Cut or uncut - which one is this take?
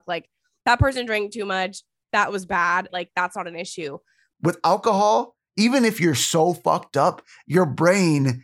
cut